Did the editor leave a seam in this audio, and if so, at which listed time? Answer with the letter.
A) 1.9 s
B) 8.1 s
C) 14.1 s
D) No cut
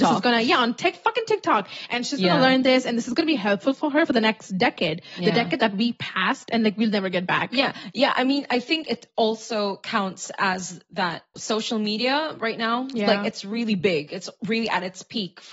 D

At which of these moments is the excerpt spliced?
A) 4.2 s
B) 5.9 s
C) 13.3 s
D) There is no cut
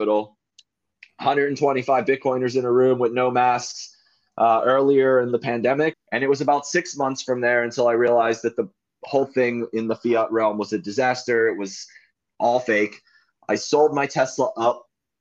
B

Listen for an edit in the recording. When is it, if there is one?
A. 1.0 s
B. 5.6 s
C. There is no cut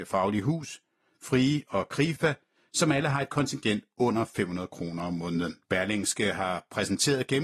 B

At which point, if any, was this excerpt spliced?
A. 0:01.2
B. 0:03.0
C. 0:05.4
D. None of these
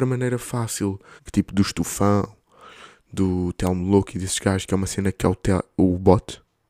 A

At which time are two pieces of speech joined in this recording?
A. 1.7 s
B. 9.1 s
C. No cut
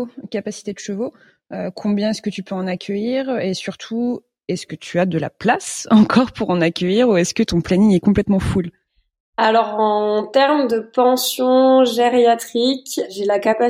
C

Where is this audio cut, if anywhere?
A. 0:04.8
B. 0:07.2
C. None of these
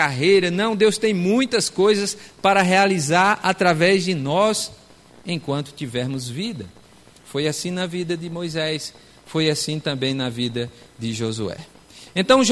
C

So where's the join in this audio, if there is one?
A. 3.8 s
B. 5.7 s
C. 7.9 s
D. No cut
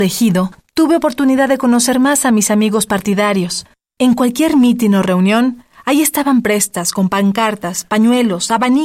A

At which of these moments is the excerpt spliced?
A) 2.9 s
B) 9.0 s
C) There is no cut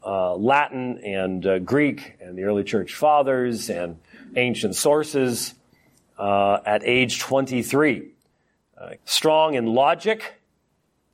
B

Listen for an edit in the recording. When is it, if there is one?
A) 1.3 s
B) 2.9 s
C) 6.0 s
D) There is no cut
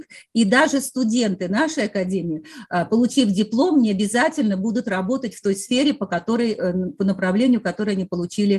D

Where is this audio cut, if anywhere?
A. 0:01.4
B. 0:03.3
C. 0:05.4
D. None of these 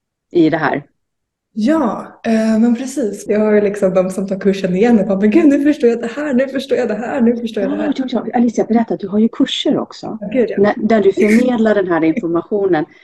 B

